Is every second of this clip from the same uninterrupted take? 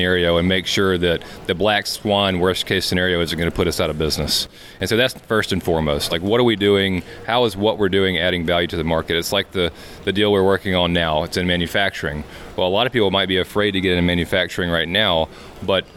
yes; 0 cuts

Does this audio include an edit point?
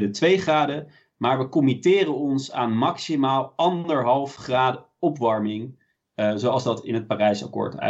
no; 0 cuts

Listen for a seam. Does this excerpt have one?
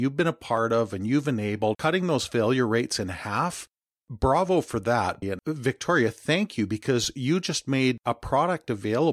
yes; 2 cuts; at 1.7 s, 5.2 s

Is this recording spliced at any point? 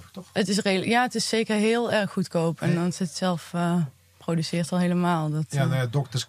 no; 0 cuts

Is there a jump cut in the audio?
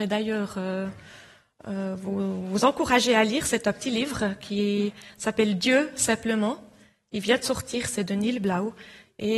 no; 0 cuts

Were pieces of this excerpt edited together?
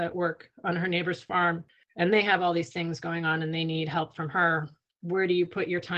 yes; 1 cut; at 4.9 s

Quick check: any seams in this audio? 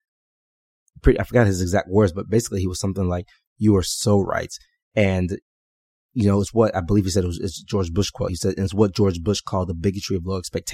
no; 0 cuts

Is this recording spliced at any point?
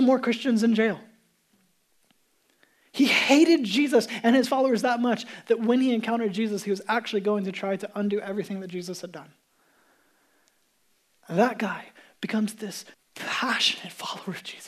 yes; 1 cut; at 12.9 s

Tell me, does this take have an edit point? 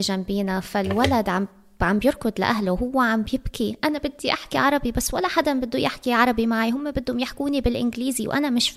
no; 0 cuts

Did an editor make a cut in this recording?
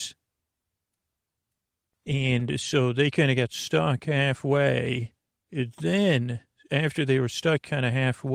no; 0 cuts

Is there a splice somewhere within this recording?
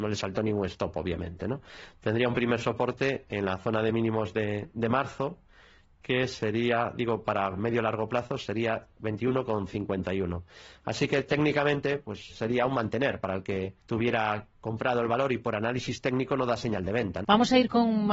yes; 3 cuts; at 12.3 s, 13.8 s, 17.2 s

